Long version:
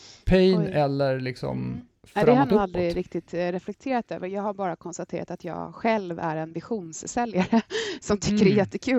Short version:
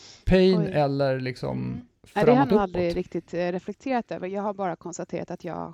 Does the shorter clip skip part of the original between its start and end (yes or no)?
no